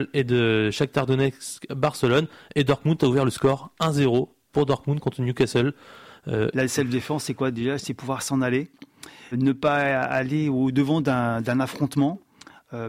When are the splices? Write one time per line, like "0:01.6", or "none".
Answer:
0:06.5
0:09.3